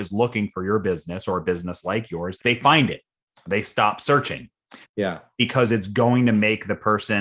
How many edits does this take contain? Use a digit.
2